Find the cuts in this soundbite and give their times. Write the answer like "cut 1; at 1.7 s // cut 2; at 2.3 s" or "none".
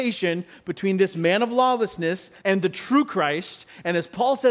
cut 1; at 2.4 s